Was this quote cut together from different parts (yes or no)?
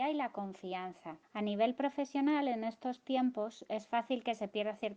yes